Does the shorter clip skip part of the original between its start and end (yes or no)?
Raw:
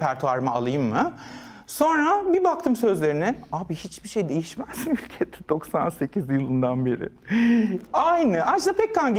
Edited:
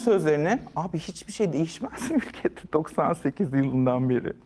no